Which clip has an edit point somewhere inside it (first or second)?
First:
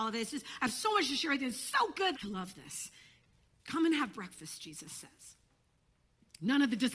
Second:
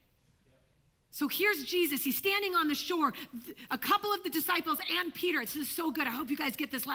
first